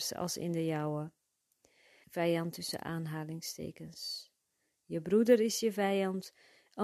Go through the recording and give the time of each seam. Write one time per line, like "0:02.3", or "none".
0:02.0